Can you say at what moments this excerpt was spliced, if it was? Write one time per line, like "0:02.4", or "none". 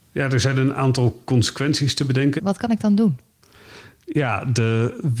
0:02.4